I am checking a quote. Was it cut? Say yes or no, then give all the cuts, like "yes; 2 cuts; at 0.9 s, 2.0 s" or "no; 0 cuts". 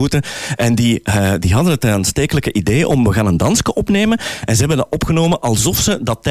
no; 0 cuts